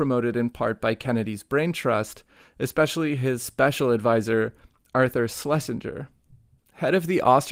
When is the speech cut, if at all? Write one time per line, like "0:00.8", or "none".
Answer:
0:06.6